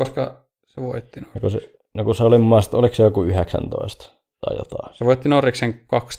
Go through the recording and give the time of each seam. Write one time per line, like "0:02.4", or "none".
none